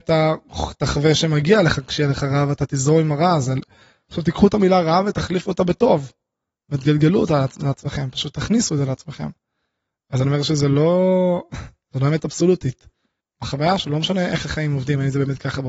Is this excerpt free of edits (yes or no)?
no